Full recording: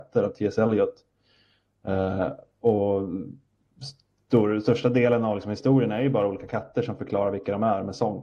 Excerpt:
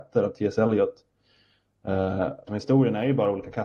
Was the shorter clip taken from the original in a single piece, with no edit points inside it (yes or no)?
no